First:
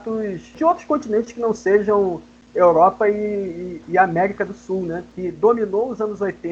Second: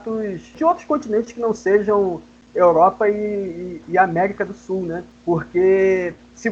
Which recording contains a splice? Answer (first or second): first